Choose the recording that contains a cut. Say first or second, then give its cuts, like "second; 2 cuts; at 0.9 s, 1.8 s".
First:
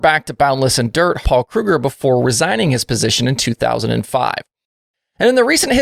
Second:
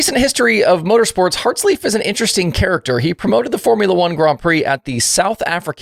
first; 1 cut; at 1.2 s